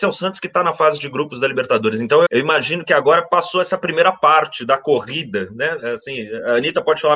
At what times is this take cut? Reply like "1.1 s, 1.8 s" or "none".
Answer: 2.3 s